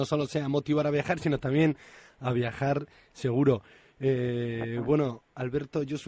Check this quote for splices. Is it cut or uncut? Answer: uncut